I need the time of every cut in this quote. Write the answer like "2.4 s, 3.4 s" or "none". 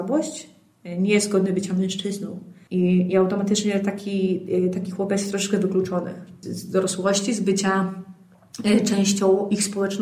none